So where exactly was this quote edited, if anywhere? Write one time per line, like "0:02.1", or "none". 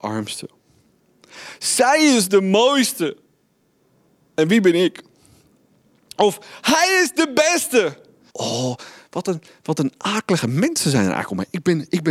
0:08.3